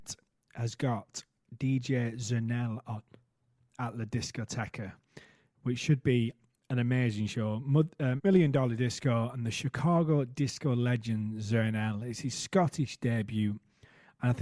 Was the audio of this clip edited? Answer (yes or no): yes